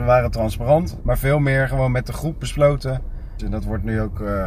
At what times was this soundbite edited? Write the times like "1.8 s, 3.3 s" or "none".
1.0 s, 3.4 s

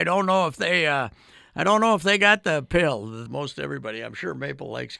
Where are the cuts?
3.3 s

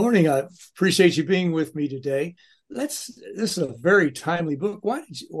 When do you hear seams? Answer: none

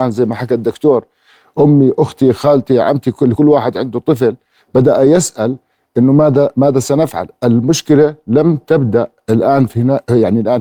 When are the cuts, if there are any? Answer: none

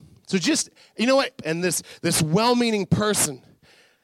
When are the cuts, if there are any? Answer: 1.4 s

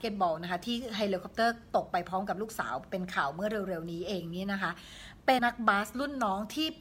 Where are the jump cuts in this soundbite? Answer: 5.4 s

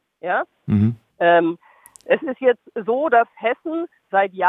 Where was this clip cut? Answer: 1.1 s

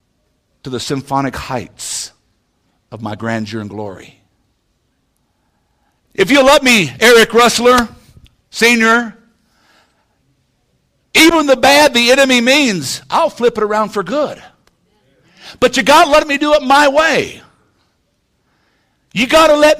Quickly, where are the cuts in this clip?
6.0 s

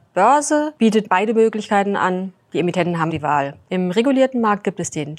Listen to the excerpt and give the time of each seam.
3.1 s

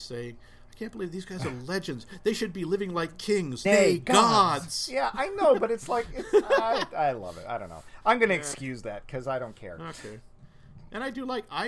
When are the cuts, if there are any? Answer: 3.6 s

